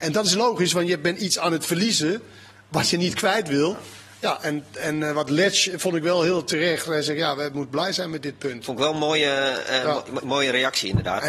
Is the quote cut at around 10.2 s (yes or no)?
no